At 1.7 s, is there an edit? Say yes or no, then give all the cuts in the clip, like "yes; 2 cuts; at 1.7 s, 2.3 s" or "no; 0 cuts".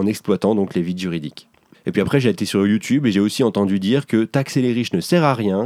yes; 1 cut; at 1.7 s